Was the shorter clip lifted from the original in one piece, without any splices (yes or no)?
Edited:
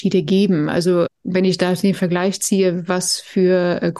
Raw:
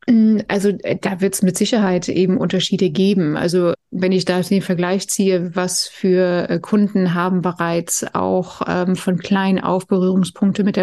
yes